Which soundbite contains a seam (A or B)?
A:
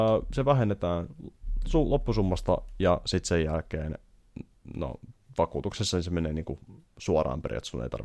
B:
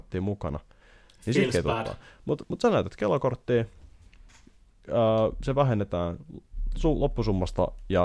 B